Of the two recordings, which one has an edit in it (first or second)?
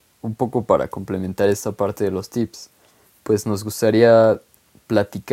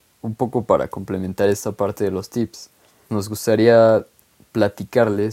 second